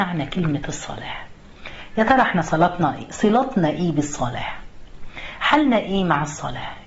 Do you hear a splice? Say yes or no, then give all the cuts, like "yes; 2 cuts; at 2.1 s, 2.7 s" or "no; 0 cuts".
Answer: no; 0 cuts